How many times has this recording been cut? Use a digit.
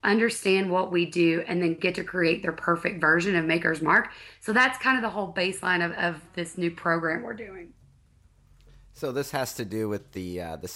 0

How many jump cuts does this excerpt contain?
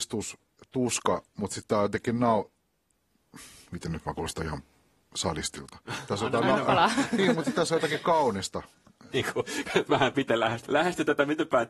2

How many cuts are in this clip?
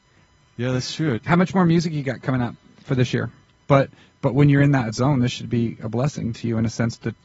2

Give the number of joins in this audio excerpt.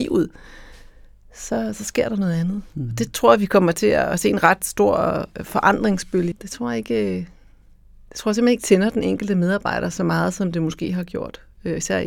1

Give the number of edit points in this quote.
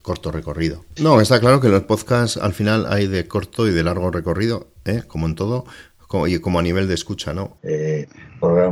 2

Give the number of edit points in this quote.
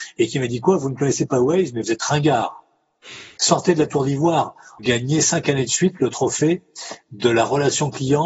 2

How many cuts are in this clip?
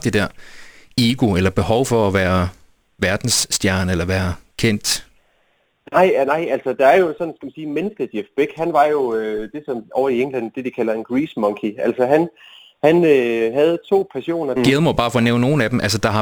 1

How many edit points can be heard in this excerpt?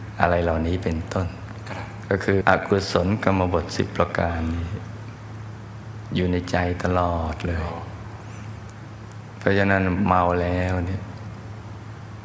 1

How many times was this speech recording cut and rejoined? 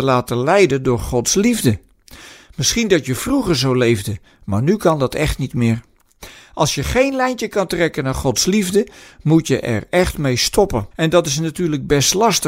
1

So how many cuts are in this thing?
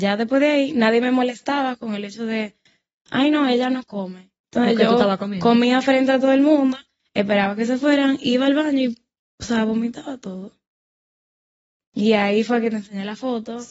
0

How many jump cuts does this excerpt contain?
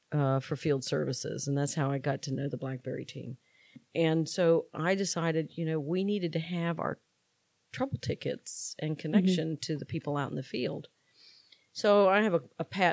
0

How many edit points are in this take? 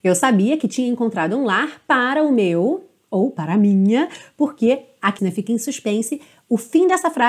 1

